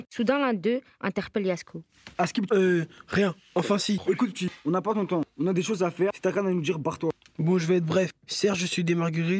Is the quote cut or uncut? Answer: cut